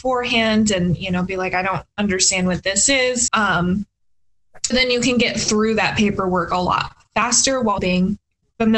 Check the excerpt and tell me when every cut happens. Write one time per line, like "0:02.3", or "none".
0:03.3
0:04.7
0:07.8